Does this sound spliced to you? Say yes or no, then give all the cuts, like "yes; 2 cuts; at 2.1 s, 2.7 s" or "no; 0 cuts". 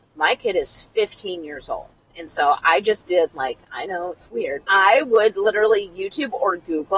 yes; 1 cut; at 4.6 s